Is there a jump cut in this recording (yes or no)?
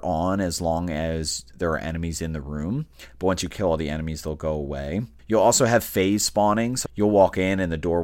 yes